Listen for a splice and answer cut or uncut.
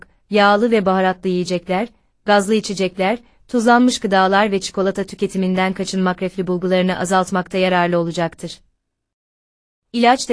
uncut